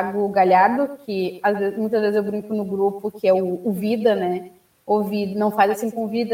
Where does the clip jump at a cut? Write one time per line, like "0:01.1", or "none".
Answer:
none